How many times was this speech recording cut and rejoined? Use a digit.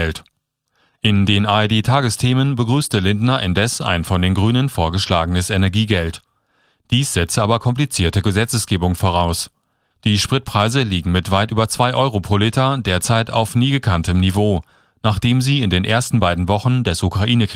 1